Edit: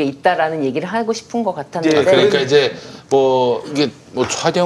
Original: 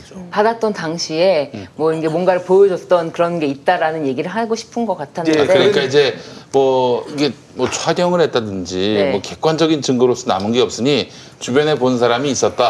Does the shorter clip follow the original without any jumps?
yes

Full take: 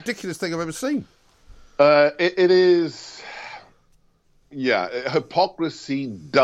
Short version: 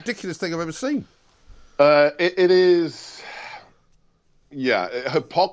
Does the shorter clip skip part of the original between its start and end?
no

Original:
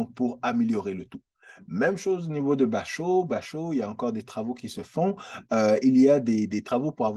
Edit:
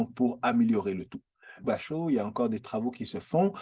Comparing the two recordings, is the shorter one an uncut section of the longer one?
no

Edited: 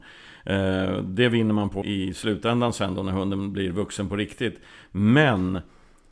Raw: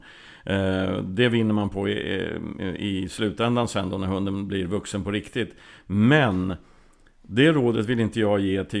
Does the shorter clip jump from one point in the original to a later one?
yes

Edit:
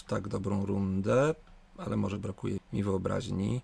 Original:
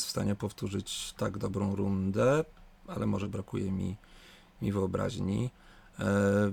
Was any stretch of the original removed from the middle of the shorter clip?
yes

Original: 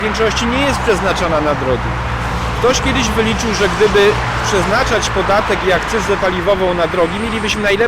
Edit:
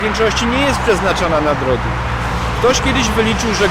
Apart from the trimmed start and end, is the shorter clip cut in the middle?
no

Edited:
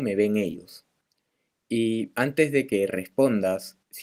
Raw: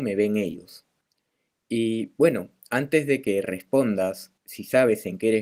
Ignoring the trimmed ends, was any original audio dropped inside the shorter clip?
yes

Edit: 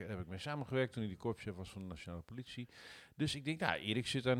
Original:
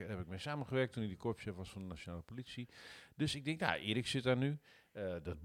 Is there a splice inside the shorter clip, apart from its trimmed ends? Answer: no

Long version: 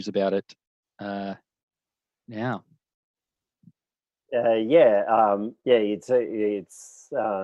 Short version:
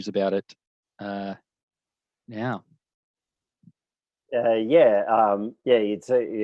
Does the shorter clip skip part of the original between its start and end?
no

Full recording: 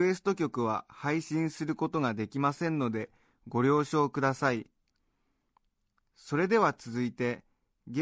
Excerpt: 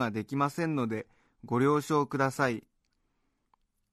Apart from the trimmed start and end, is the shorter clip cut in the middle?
no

